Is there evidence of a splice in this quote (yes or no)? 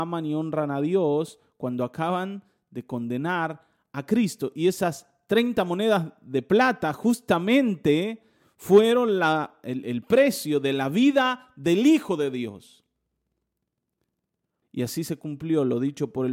yes